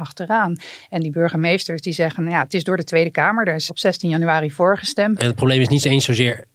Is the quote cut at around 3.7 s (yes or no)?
yes